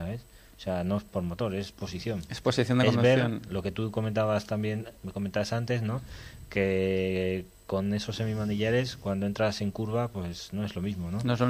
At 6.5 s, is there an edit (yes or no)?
no